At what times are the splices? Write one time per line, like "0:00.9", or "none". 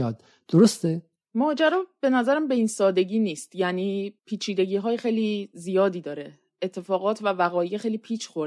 0:04.2